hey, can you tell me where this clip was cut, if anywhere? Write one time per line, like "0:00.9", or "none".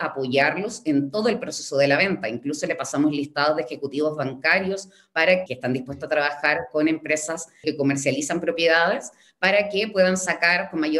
0:05.5
0:07.6